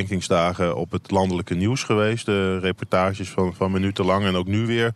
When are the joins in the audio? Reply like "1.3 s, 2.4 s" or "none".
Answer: none